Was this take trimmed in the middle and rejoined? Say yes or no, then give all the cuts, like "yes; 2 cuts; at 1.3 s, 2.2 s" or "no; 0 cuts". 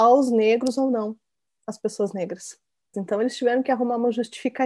yes; 1 cut; at 2.9 s